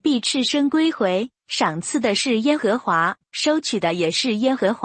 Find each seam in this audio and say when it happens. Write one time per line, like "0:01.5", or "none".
none

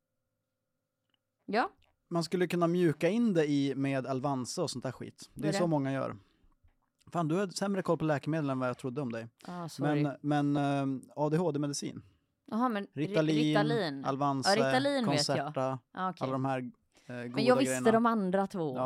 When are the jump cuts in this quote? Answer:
none

